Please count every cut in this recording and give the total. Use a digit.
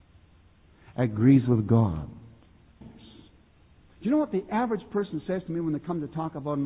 1